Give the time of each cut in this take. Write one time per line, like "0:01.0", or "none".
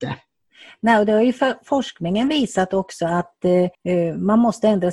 0:03.7